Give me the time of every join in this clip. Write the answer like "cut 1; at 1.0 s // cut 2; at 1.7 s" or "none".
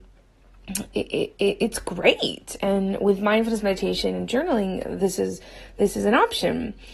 none